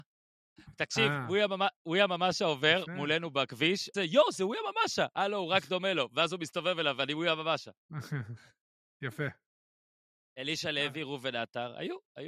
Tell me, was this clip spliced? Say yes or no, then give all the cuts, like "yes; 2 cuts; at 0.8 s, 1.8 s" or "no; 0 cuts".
yes; 1 cut; at 3.9 s